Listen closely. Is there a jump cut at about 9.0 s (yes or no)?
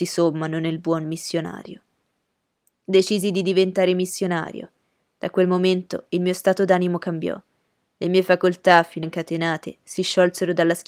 yes